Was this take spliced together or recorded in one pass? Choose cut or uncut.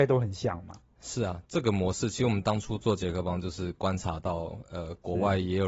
cut